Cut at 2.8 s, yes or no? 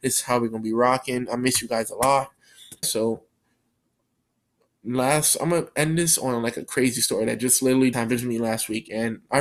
yes